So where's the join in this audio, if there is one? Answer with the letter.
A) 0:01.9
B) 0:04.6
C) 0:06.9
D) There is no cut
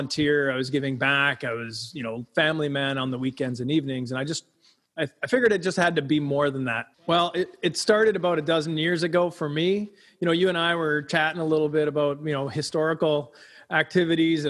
C